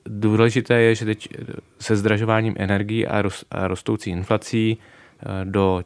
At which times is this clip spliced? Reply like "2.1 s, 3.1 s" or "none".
none